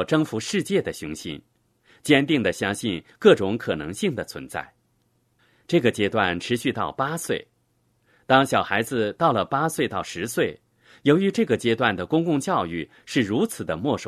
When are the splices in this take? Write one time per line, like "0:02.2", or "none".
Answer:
none